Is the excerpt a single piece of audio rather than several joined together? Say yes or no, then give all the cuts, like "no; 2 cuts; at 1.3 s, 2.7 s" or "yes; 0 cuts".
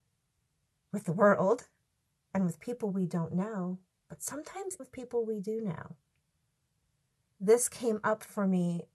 no; 1 cut; at 4.8 s